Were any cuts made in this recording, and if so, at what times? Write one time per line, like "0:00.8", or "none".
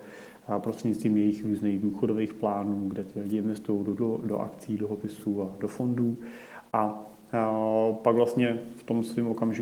none